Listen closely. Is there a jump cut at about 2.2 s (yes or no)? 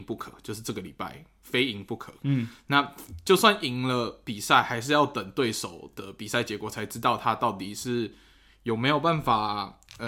no